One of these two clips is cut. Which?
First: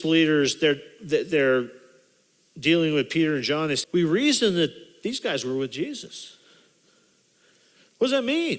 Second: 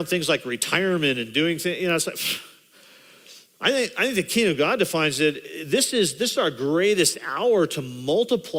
first; 1 cut; at 3.8 s

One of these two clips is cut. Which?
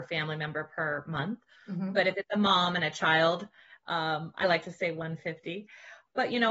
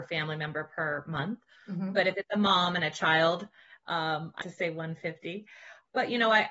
second; 1 cut; at 4.4 s

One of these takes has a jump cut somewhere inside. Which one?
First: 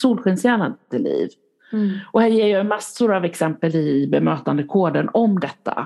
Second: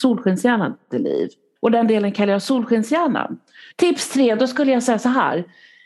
second; 2 cuts; at 1.6 s, 3.7 s

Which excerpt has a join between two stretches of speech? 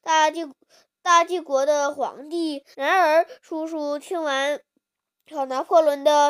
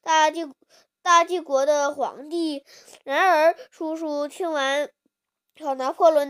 first; 1 cut; at 2.7 s

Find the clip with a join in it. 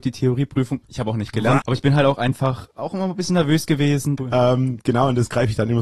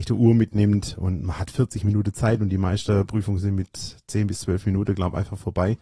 first; 2 cuts; at 1.6 s, 4.2 s

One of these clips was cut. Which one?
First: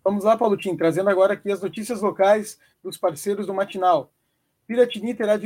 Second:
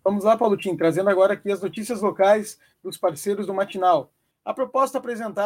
second; 1 cut; at 4.3 s

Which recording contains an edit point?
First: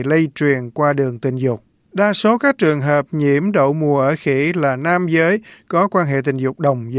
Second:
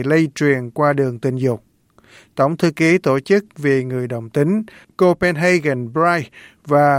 first; 1 cut; at 1.8 s

